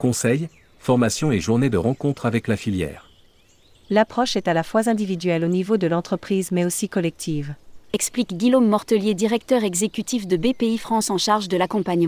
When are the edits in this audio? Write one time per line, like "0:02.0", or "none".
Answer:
0:03.7
0:07.9